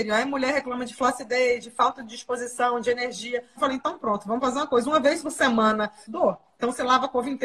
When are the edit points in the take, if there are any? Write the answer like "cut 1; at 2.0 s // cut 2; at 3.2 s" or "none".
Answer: cut 1; at 3.6 s // cut 2; at 6.1 s